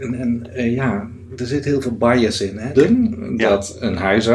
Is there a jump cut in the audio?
yes; 1 cut; at 2.7 s

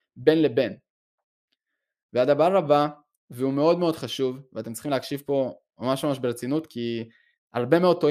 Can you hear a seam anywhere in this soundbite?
no; 0 cuts

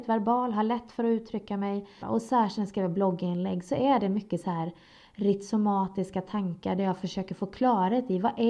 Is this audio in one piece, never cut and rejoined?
no; 1 cut; at 2.0 s

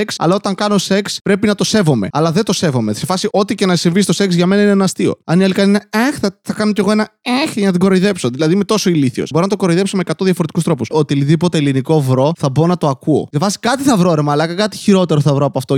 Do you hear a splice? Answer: yes; 2 cuts; at 9.3 s, 10.9 s

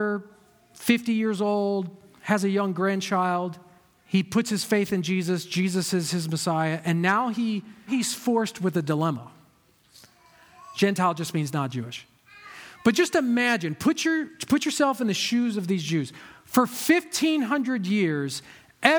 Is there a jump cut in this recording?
yes; 2 cuts; at 7.9 s, 10.7 s

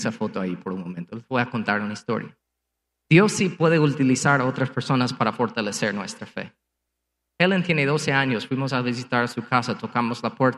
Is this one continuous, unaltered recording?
yes; 0 cuts

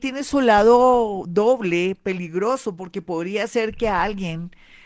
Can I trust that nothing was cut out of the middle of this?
yes; 0 cuts

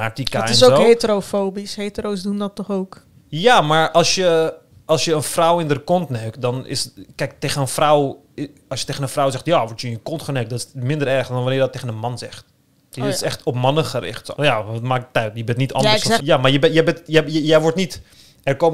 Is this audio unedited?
no; 2 cuts; at 14.3 s, 16.2 s

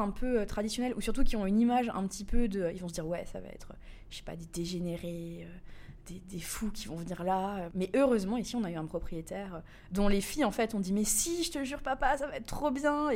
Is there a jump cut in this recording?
yes; 1 cut; at 7.7 s

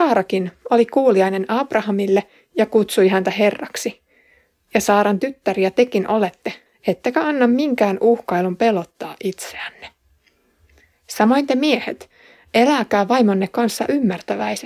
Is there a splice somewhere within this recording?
yes; 1 cut; at 6.7 s

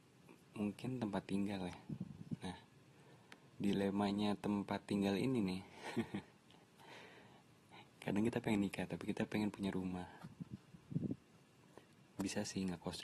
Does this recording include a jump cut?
yes; 1 cut; at 3.5 s

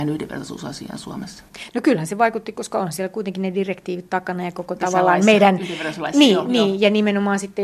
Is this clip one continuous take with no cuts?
yes; 0 cuts

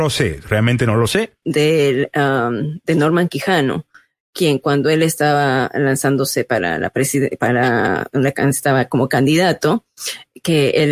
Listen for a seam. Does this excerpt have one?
yes; 1 cut; at 1.4 s

